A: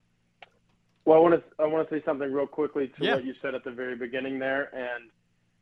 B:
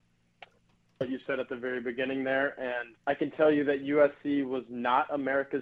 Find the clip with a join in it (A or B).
B